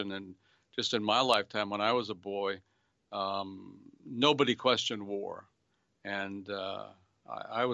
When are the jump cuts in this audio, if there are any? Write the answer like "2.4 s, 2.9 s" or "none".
none